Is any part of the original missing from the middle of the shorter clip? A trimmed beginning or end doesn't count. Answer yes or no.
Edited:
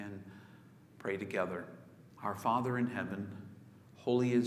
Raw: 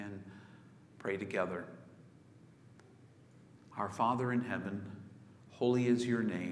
yes